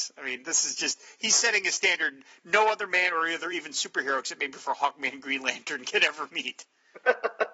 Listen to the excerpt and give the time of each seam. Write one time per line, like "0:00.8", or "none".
none